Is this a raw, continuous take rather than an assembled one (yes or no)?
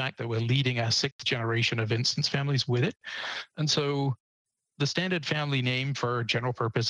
yes